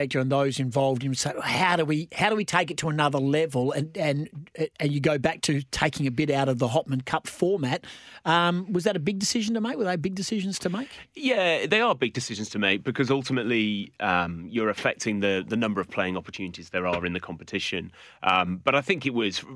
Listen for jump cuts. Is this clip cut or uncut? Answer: uncut